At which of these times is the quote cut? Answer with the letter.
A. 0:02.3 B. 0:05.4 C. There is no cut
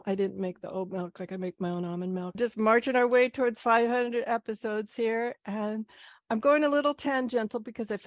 A